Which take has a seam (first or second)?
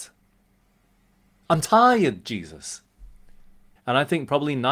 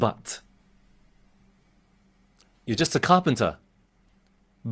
first